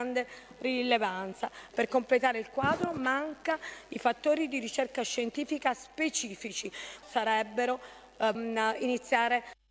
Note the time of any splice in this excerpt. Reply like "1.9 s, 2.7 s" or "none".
1.7 s, 7.0 s, 8.3 s